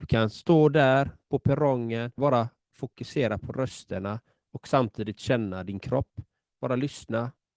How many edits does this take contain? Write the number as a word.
one